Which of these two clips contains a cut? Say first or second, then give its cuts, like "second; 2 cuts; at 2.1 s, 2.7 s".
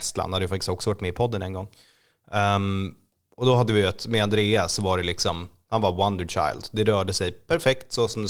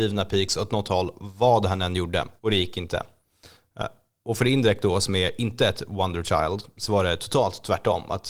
second; 1 cut; at 2.4 s